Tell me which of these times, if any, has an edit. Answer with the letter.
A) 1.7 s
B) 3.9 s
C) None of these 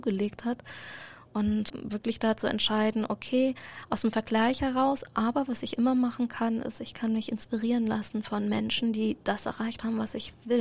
A